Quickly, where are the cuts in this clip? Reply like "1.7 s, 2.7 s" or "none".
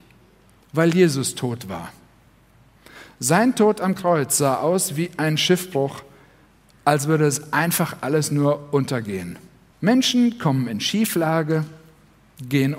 9.7 s